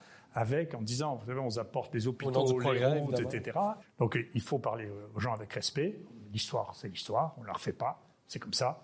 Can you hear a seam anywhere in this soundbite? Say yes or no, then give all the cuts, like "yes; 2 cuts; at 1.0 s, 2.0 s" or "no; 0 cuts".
yes; 1 cut; at 3.8 s